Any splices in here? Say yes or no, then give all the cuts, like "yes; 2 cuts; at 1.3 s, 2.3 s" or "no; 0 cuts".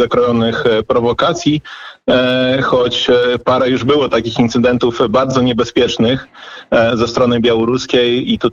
no; 0 cuts